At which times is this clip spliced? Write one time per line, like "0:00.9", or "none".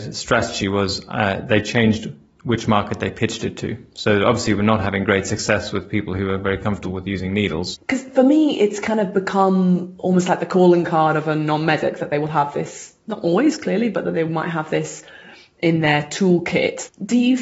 0:07.7